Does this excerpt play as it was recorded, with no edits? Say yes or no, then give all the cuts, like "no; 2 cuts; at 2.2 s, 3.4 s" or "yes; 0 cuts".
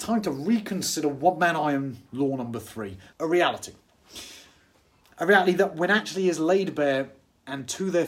no; 1 cut; at 3.1 s